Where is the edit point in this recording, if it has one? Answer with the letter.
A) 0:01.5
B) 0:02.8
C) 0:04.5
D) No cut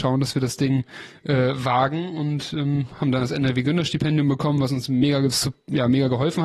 D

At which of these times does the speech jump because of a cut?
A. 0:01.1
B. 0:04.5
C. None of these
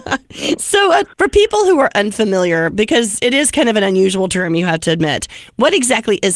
A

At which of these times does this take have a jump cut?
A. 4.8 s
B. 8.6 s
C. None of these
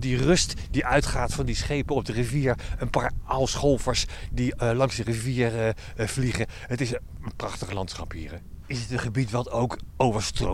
B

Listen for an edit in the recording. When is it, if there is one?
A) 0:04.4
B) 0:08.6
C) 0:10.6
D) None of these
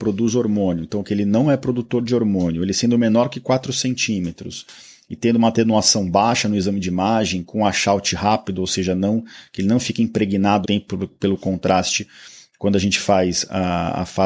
C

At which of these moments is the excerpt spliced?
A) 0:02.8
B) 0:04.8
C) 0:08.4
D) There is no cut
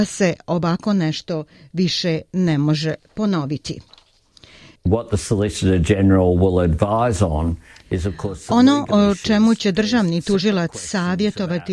B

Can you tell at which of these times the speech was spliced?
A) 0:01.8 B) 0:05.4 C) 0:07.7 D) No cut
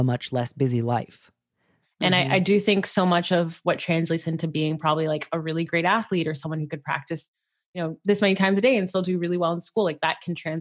A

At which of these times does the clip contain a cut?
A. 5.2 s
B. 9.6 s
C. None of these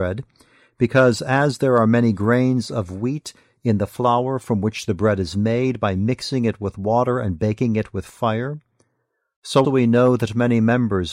B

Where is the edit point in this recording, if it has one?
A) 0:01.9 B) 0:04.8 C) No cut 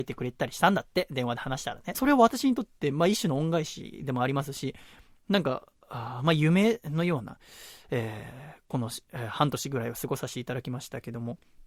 A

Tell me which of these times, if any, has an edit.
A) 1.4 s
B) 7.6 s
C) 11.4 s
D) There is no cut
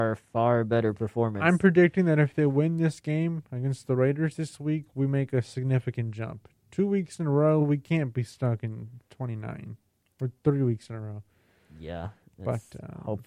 D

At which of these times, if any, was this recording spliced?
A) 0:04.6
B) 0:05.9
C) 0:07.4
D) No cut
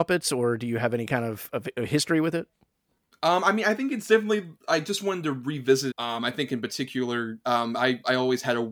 B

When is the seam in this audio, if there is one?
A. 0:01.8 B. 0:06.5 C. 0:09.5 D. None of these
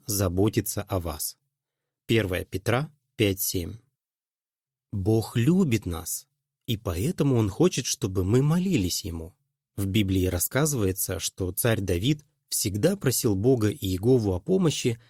C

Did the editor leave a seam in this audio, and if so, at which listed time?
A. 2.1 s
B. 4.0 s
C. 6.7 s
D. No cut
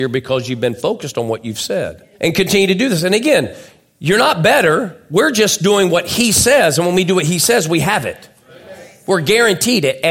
A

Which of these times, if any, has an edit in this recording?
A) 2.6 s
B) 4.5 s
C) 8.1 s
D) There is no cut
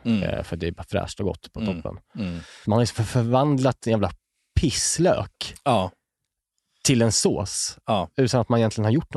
A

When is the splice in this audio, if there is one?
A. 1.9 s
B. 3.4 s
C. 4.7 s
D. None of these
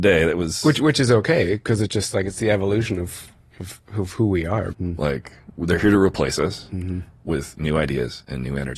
C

